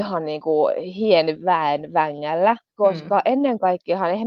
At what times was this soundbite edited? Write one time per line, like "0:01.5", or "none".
0:02.7